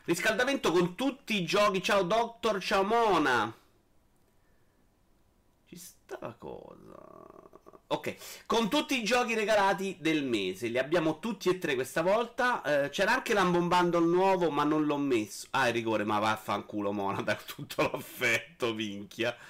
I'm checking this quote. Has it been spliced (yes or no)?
no